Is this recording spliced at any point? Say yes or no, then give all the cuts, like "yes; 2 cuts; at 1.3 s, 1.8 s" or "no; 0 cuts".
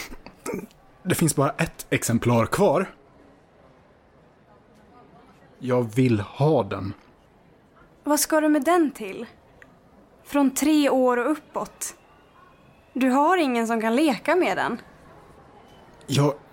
no; 0 cuts